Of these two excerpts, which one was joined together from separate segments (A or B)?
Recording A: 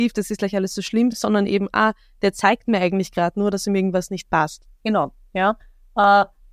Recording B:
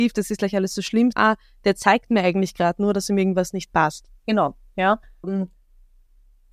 B